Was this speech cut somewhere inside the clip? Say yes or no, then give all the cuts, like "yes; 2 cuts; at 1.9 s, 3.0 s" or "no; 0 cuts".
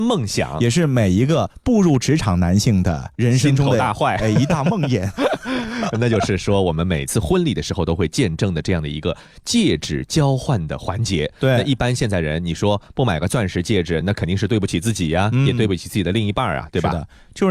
no; 0 cuts